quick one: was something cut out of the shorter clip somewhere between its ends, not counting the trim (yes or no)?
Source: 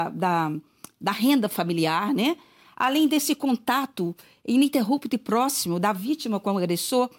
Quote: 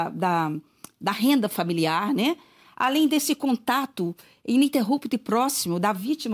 no